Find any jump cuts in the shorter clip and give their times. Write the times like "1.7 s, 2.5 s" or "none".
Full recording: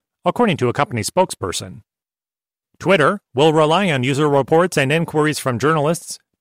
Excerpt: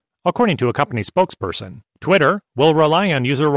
1.9 s

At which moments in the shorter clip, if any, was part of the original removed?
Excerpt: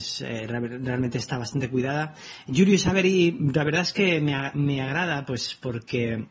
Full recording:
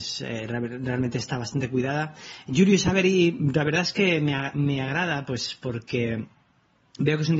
none

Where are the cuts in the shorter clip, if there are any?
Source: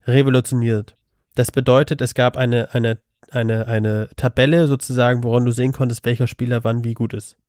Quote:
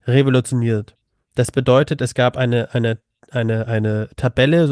none

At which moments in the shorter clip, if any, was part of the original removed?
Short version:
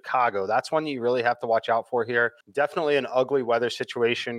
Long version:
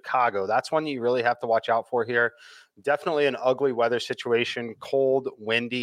2.4 s

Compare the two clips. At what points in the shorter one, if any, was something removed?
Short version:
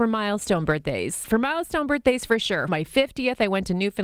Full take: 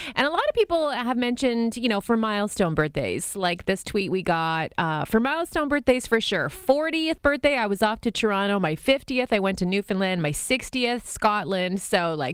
1.2 s, 2.7 s

